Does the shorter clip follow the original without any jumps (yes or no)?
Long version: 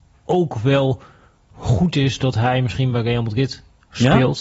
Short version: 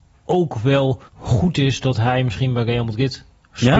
no